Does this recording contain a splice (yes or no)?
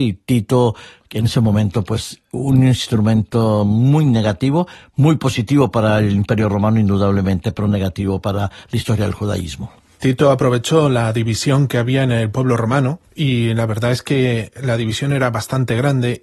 no